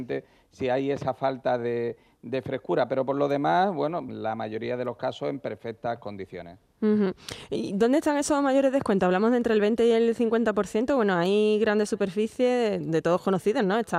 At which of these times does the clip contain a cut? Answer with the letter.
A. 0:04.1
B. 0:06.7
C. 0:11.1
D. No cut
A